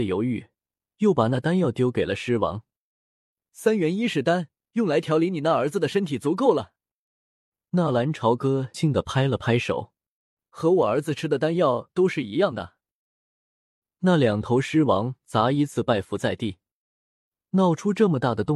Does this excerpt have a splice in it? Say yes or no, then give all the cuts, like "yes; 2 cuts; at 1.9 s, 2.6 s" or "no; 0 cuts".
yes; 1 cut; at 8.7 s